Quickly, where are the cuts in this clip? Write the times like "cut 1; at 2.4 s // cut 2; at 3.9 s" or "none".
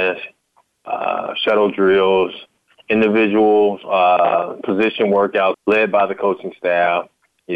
cut 1; at 5.5 s